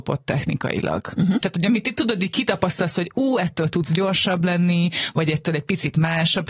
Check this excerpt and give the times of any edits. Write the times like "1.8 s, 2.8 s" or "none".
1.4 s